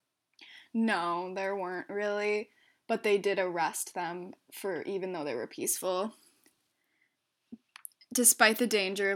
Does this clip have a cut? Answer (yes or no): no